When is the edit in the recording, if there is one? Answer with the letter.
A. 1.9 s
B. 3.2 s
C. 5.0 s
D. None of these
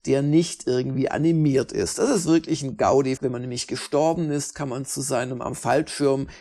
B